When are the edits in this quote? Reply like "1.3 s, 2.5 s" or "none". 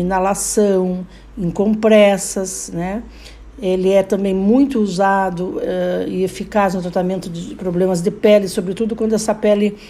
none